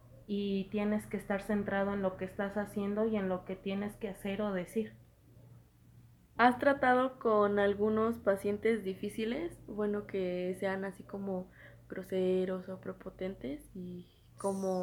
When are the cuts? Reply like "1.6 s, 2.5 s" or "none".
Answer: 6.3 s